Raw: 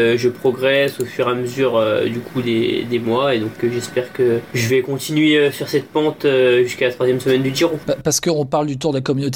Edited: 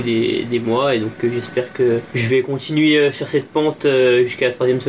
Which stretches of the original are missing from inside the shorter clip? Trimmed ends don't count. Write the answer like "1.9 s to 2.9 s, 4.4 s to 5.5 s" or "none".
none

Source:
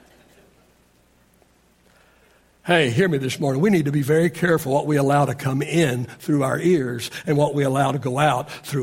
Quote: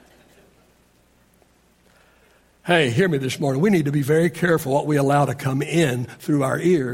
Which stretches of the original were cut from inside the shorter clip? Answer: none

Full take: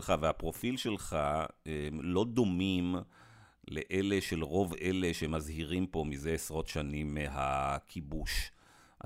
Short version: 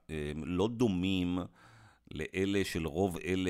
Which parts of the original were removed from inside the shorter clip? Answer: none

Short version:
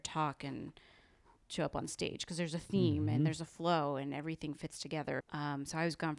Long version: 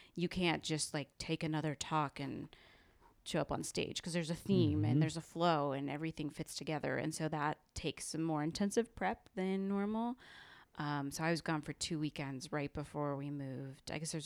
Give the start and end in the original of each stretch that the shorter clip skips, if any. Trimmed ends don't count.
7.0 s to 10.7 s

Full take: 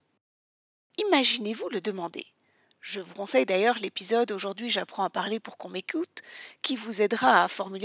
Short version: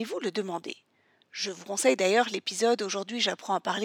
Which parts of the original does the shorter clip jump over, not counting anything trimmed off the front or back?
none

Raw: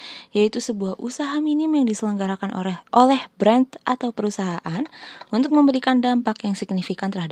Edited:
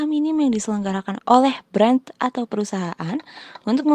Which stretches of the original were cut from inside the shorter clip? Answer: 2.5 s to 2.8 s

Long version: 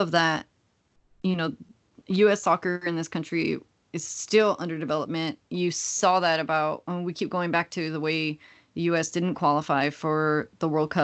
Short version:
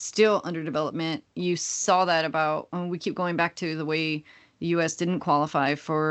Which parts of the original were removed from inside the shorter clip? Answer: none

